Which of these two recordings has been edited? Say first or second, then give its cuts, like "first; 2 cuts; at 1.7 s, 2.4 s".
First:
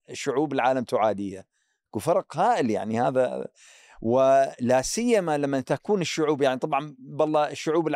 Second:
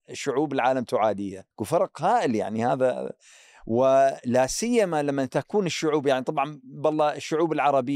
second; 1 cut; at 1.5 s